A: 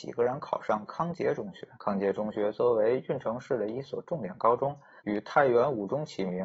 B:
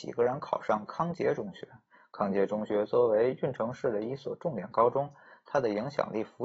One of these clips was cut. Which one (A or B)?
A